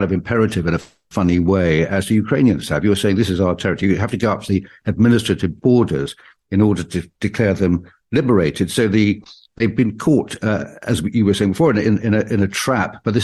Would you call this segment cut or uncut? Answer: uncut